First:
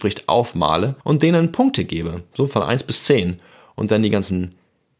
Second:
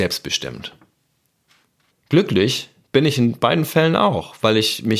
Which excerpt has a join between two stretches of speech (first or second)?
first